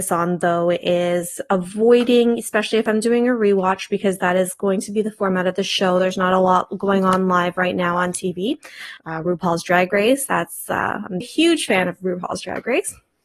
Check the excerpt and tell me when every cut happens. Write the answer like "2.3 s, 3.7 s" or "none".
9.0 s, 11.2 s